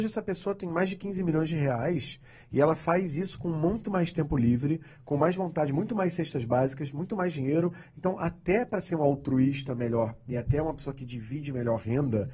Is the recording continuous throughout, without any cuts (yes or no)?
yes